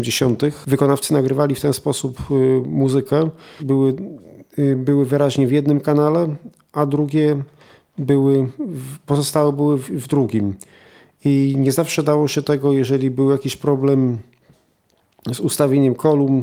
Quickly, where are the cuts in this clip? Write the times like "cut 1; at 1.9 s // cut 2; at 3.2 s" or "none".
cut 1; at 3.6 s